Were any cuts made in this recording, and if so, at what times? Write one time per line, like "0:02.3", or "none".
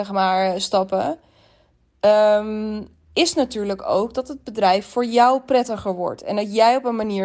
none